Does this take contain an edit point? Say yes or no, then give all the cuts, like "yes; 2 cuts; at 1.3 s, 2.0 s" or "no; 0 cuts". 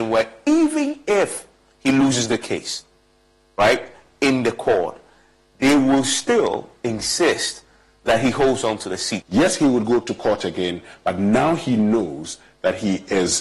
yes; 1 cut; at 9.2 s